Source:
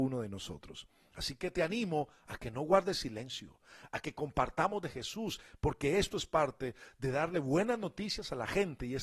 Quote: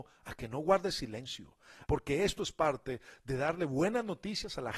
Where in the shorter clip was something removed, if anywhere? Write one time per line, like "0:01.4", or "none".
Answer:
0:01.9